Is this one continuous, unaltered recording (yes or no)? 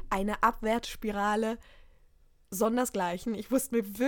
yes